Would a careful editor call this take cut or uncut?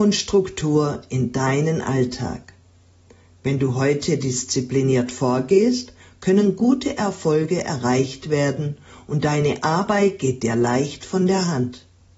uncut